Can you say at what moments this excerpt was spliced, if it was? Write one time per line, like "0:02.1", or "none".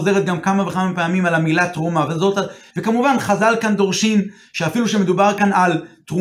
0:02.7